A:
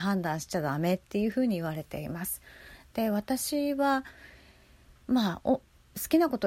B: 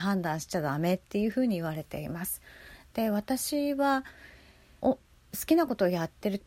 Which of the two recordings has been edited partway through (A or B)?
B